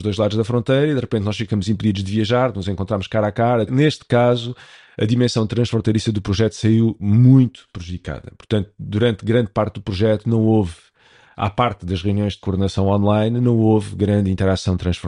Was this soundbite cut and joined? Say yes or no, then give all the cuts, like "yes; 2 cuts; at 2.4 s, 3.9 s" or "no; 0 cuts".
yes; 1 cut; at 3.7 s